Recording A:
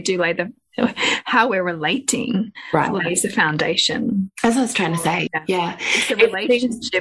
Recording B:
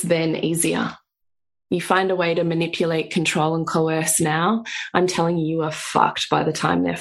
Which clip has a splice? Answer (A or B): A